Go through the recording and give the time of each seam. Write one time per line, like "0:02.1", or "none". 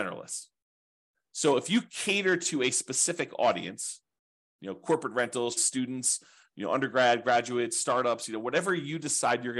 0:05.6